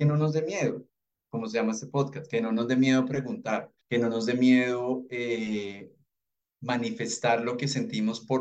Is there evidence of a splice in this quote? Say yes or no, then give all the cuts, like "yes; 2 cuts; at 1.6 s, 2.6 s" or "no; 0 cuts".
yes; 1 cut; at 3.8 s